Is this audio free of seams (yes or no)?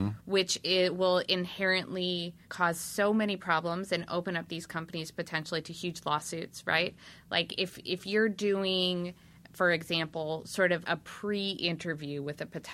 no